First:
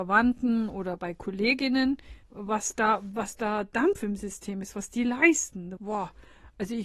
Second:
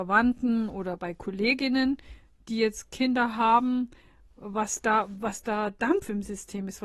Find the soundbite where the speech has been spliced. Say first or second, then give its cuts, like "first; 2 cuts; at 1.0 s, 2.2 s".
first; 2 cuts; at 2.2 s, 5.8 s